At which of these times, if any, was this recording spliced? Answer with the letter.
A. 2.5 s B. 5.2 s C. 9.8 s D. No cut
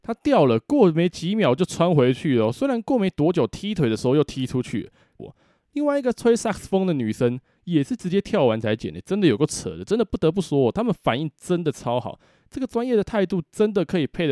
B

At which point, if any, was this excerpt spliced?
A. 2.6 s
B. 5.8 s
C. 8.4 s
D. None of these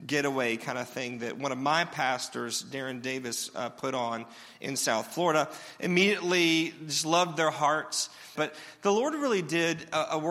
C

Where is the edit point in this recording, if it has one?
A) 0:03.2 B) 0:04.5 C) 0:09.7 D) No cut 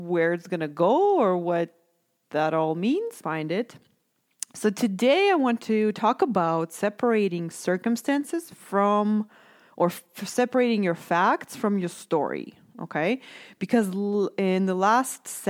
A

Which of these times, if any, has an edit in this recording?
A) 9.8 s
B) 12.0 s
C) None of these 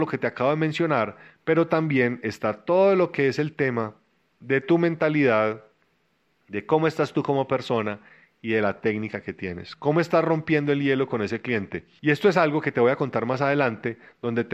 B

